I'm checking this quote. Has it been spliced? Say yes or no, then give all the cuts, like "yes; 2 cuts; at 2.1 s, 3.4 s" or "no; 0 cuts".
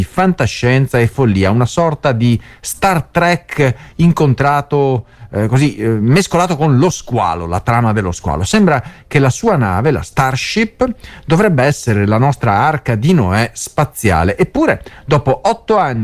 no; 0 cuts